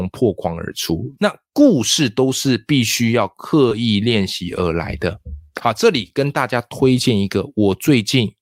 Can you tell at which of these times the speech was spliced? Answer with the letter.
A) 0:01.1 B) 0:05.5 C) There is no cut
A